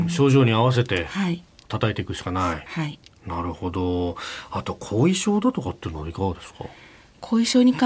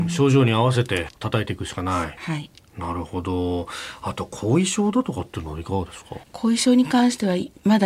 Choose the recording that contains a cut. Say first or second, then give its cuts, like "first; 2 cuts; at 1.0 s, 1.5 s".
second; 2 cuts; at 1.1 s, 6.2 s